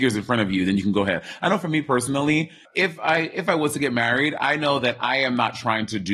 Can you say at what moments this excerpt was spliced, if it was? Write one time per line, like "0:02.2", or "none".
0:02.7